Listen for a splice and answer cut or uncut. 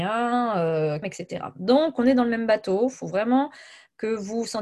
cut